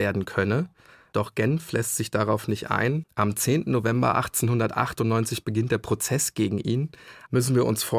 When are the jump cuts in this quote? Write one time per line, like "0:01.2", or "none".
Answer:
none